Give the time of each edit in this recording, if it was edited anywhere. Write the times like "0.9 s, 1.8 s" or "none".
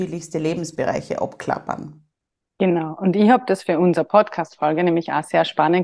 none